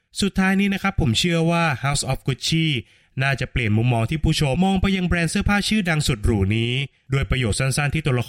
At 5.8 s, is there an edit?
no; 1 cut; at 4.6 s

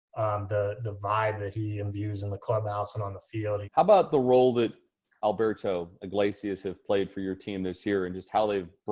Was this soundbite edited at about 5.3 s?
no; 1 cut; at 3.6 s

